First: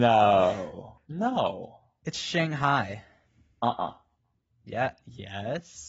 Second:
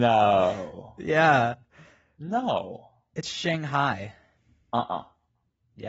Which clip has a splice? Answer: first; 1 cut; at 1.0 s

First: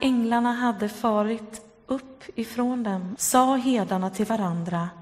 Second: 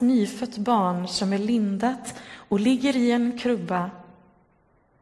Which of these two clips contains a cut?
first; 1 cut; at 3.2 s

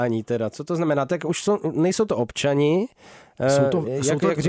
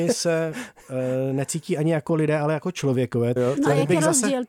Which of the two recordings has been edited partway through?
second; 1 cut; at 3.4 s

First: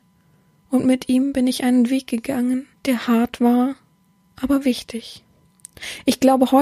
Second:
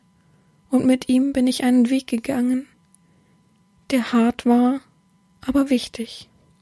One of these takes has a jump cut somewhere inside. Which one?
first; 1 cut; at 2.8 s

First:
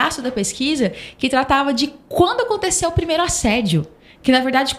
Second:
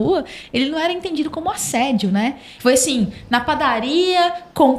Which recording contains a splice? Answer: second; 1 cut; at 2.6 s

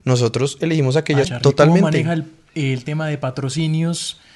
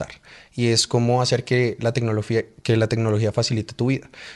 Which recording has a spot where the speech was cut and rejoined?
first; 1 cut; at 1.2 s

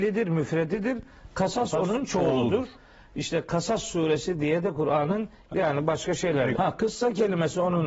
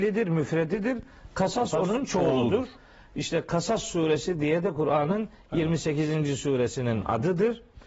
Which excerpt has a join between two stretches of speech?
first; 2 cuts; at 5.5 s, 6.5 s

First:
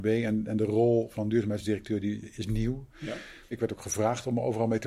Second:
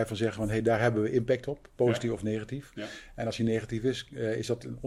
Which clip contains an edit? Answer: first; 1 cut; at 3.5 s

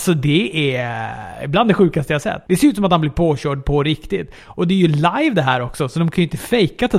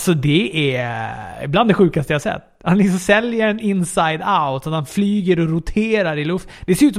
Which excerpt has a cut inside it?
first; 1 cut; at 2.5 s

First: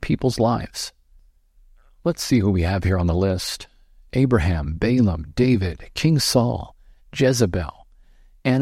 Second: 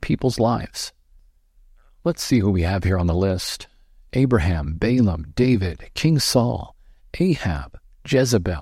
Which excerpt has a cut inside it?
first; 1 cut; at 7.0 s

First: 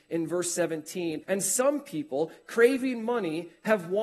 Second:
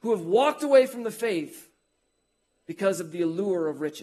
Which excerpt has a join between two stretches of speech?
first; 1 cut; at 1.2 s

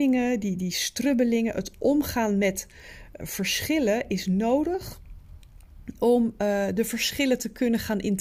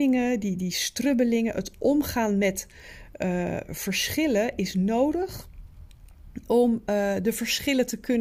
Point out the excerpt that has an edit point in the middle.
first; 1 cut; at 3.2 s

